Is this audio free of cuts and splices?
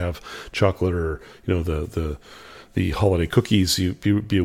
yes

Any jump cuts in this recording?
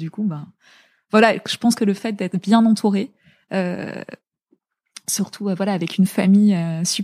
no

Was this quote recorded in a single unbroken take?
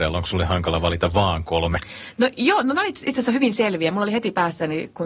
yes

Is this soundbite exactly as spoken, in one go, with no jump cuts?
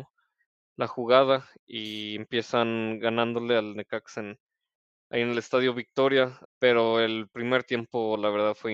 no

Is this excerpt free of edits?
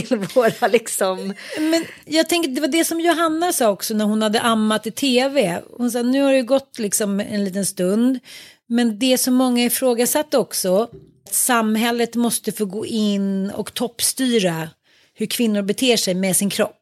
no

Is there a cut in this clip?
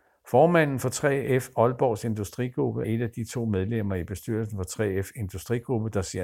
yes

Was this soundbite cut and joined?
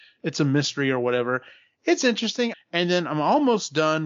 yes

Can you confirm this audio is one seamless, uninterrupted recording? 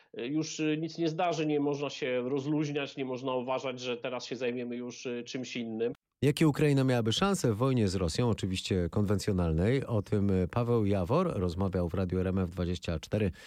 yes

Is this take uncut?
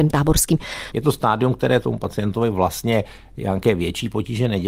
no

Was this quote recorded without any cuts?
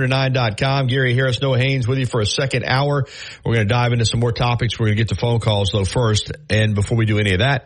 yes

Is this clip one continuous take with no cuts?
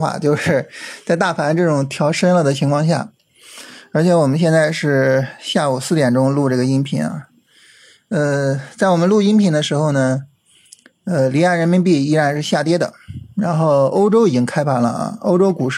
yes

